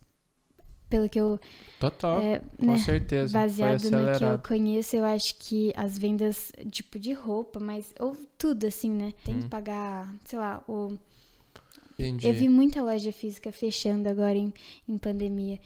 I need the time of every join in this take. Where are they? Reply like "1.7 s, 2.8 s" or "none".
9.3 s, 12.0 s

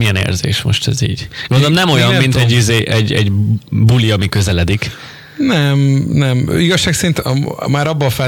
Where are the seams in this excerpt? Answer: none

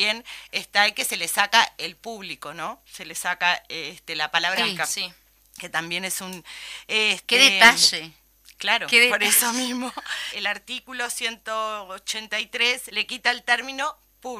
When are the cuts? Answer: 4.6 s, 10.3 s, 12.9 s

